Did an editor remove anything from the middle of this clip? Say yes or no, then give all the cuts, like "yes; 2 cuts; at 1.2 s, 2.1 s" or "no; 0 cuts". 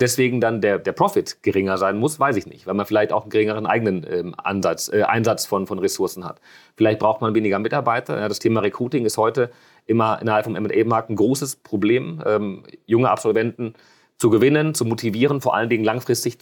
no; 0 cuts